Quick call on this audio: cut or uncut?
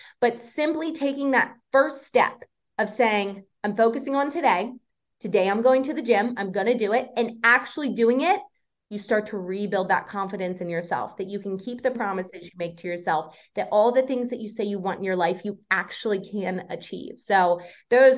uncut